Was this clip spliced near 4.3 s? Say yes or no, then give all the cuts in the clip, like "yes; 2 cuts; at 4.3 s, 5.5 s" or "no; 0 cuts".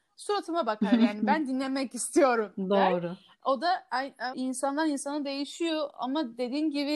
yes; 1 cut; at 4.3 s